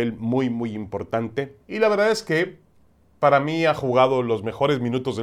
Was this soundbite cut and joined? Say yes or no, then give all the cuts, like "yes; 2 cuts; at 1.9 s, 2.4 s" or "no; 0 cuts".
yes; 1 cut; at 1.6 s